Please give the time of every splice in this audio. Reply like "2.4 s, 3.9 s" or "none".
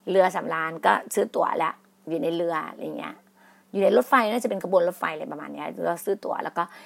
none